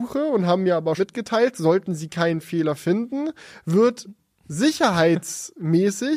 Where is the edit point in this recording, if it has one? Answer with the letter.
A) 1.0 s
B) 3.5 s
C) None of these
A